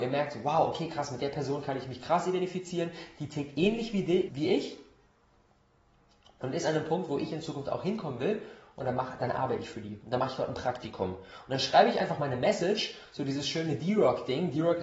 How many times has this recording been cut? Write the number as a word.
one